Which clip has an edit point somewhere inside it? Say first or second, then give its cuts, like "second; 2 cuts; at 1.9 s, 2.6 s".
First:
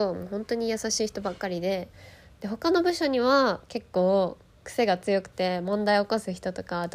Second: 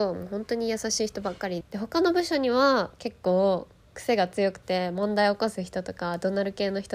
second; 1 cut; at 1.6 s